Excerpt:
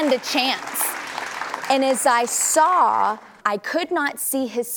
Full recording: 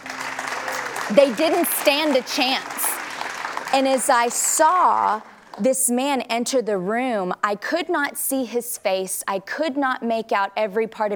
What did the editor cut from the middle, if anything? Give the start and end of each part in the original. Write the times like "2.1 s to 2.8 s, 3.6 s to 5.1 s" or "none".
5.4 s to 7.4 s